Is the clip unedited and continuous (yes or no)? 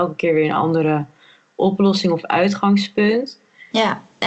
yes